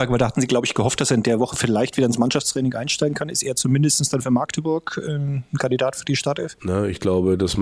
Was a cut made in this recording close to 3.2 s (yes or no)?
no